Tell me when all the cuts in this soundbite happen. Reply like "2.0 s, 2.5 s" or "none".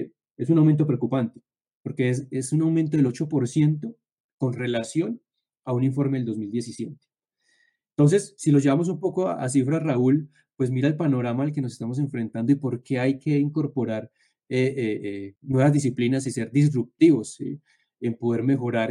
15.4 s